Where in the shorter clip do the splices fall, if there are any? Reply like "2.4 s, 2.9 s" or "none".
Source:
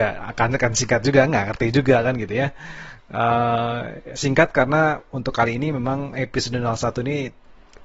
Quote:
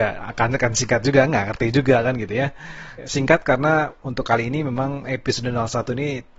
3.0 s